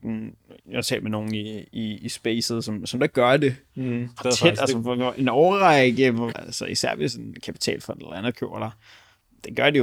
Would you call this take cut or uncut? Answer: cut